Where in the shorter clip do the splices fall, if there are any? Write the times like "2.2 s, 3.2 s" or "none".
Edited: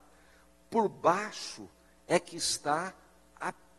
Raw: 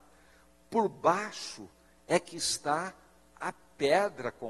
none